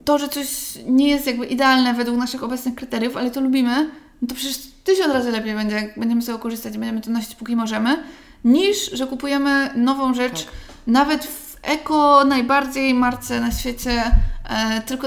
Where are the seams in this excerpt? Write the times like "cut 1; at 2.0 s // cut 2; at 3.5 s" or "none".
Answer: none